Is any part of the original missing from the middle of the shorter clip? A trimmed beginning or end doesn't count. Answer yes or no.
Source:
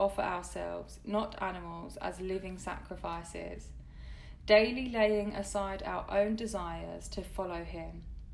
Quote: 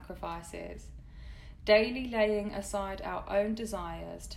no